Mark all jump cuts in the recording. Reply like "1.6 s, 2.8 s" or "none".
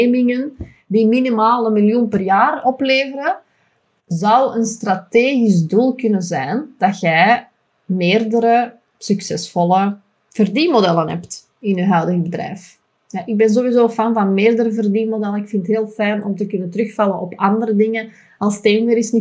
none